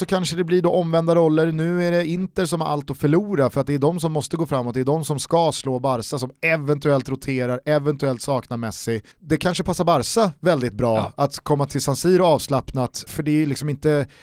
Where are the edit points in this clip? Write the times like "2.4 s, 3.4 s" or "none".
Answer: 9.1 s, 13.1 s